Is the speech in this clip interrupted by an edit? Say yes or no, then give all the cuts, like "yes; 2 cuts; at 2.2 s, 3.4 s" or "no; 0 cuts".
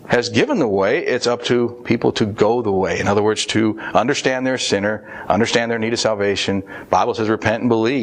no; 0 cuts